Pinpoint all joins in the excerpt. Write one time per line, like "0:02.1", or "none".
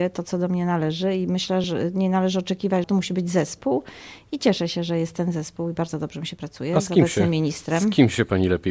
0:01.6
0:02.8